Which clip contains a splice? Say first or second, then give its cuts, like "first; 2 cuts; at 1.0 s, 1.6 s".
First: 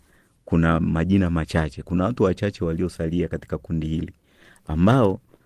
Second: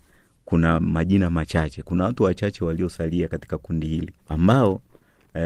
second; 1 cut; at 4.2 s